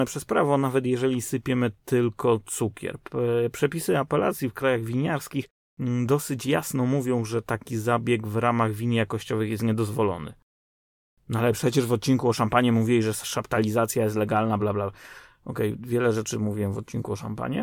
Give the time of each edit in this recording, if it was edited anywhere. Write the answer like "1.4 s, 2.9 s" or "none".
14.6 s

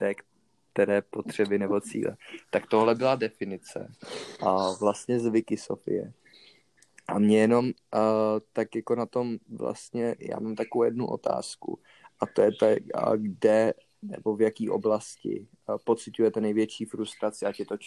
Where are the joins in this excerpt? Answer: none

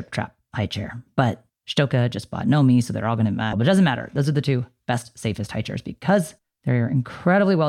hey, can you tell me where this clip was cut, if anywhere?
3.5 s

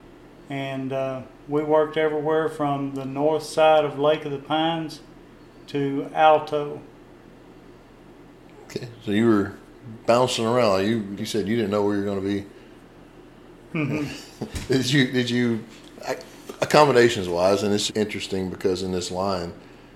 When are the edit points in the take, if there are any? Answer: 11.2 s, 13.7 s, 17.9 s

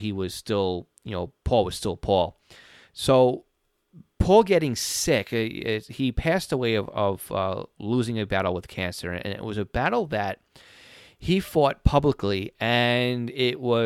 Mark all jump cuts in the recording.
none

